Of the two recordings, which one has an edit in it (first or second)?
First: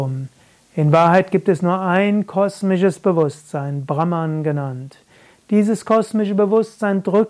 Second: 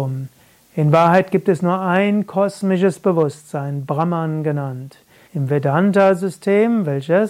second